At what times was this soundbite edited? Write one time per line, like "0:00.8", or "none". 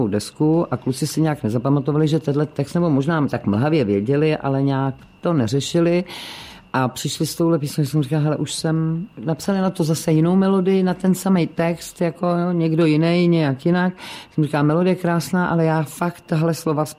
none